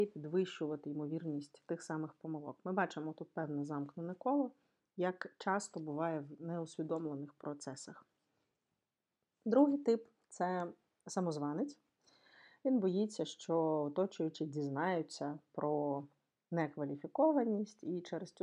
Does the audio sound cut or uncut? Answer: uncut